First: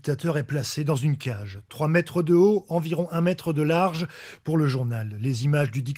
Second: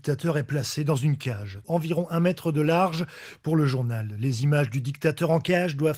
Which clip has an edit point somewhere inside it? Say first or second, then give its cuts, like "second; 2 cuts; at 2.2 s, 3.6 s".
second; 1 cut; at 1.6 s